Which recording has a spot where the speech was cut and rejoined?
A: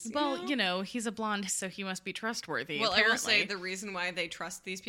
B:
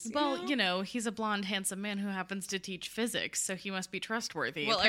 A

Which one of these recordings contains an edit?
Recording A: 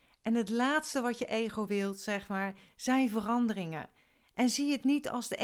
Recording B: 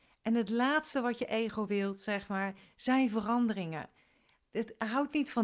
A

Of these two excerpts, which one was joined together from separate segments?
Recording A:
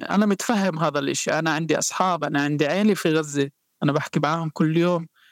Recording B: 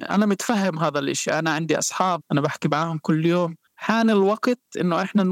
B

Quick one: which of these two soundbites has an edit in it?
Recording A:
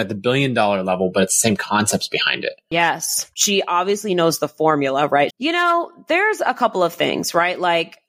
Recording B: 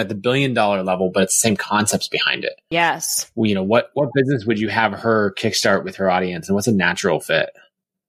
A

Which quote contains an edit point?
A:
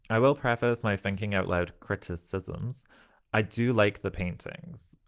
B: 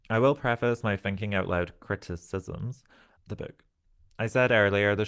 B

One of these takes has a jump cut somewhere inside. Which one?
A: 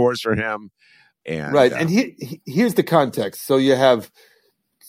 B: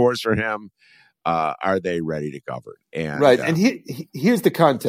A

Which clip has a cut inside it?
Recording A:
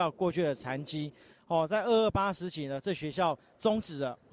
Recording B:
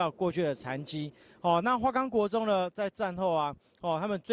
A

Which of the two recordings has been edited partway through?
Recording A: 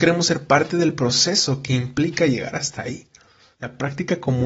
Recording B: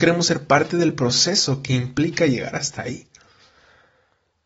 A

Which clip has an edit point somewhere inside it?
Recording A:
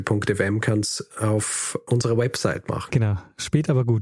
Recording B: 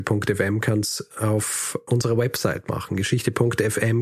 A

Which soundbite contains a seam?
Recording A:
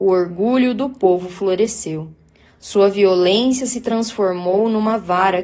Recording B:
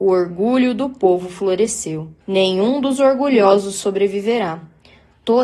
B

